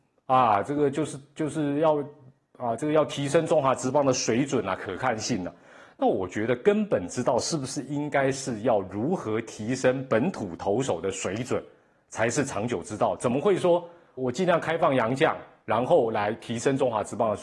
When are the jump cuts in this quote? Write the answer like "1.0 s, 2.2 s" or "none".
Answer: 14.2 s